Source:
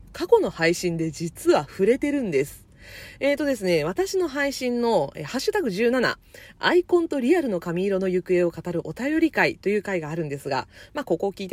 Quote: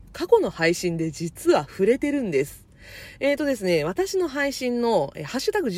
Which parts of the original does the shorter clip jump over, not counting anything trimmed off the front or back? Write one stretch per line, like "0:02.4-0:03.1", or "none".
none